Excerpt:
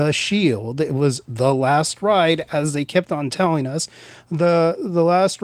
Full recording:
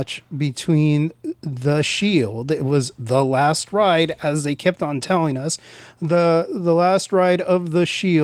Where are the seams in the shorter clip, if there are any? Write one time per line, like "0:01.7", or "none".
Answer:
none